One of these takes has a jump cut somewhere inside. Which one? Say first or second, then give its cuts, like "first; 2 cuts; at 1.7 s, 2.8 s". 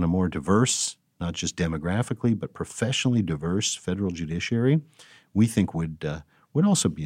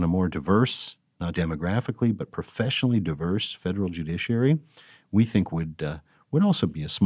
second; 1 cut; at 1.3 s